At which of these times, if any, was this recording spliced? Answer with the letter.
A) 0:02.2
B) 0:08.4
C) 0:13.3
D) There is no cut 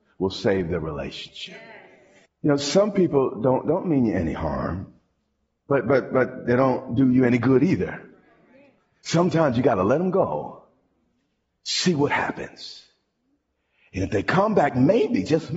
A